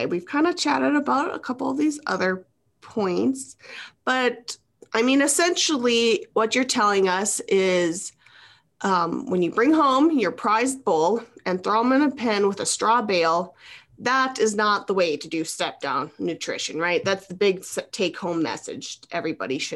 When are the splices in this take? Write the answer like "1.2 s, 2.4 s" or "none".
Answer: none